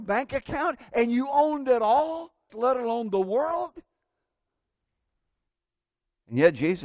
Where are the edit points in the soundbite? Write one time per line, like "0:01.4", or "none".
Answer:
0:02.5